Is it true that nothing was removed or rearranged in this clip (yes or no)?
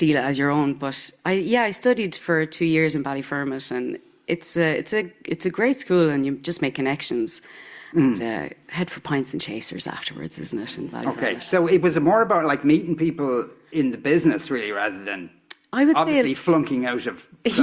yes